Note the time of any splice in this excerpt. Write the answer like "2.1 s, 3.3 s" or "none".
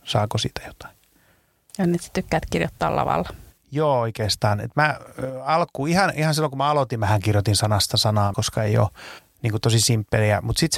8.3 s